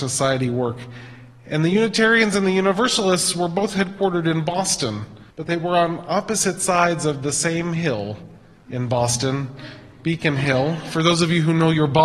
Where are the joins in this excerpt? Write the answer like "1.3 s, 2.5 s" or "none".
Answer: 5.3 s